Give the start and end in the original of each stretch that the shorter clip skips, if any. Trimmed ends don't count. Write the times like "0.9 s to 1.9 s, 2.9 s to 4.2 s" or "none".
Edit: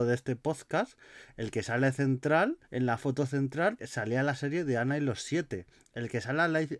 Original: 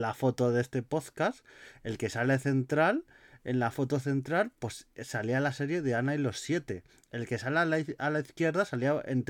3.1 s to 3.4 s, 4.5 s to 5.0 s